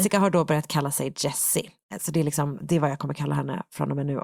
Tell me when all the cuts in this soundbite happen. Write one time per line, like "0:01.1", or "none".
0:02.6

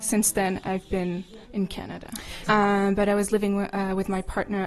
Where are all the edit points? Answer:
0:01.4
0:02.5

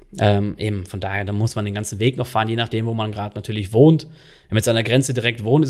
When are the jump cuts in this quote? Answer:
none

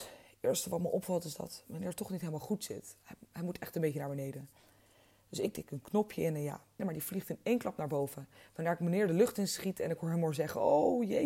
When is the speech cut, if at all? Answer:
0:06.8

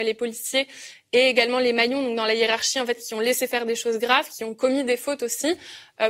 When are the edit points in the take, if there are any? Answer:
none

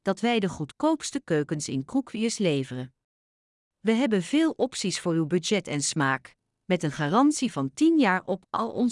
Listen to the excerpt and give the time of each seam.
0:03.6

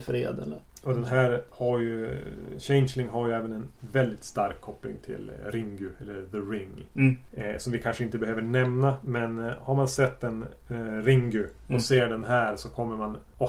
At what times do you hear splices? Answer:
none

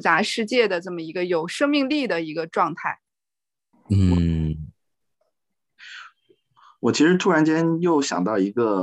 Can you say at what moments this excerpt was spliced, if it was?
0:03.7

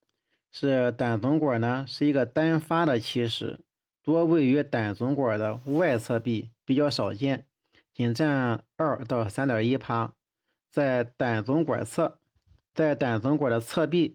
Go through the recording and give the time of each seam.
0:12.7

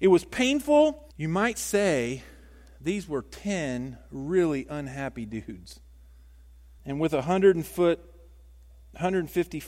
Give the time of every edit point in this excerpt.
0:01.1
0:06.8

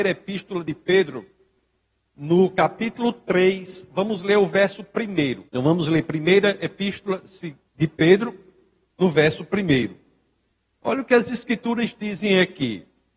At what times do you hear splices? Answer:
0:05.5
0:08.9

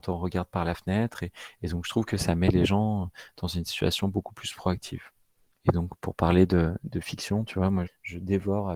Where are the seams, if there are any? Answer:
0:07.9

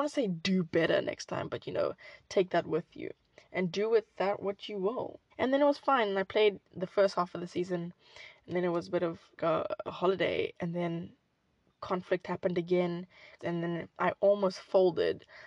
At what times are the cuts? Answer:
0:05.3
0:09.4
0:13.4

